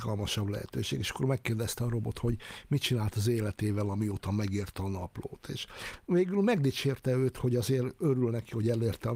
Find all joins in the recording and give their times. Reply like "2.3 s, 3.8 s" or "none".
none